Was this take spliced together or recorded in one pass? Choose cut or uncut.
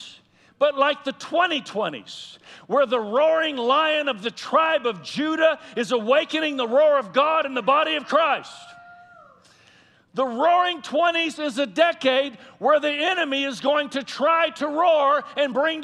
uncut